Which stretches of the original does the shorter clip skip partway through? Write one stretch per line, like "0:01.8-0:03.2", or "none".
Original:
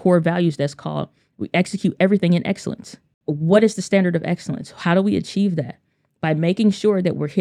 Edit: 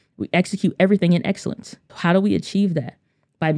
0:03.1-0:04.7